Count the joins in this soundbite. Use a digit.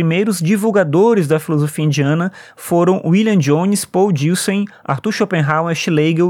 0